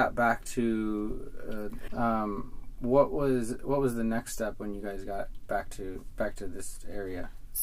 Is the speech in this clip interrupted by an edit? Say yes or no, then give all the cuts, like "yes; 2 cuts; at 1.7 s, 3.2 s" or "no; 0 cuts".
yes; 1 cut; at 1.9 s